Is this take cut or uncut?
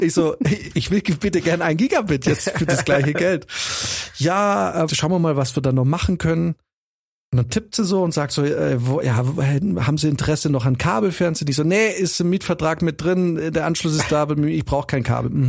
cut